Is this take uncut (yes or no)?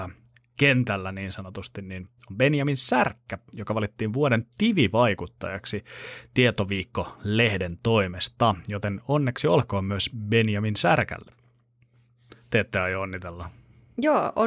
yes